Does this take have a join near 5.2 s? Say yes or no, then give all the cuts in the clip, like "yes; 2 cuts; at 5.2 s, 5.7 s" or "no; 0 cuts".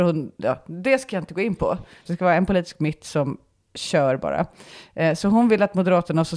no; 1 cut; at 2.1 s